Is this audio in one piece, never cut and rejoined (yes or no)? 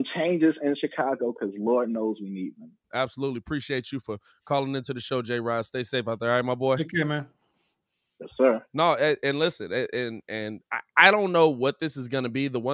no